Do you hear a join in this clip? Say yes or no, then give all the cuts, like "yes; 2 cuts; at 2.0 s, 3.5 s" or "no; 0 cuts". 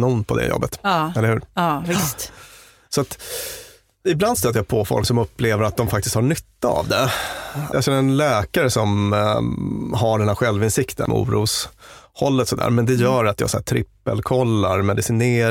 yes; 1 cut; at 11.1 s